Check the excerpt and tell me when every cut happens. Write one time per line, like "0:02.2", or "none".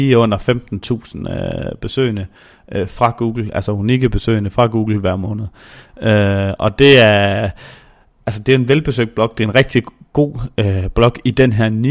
none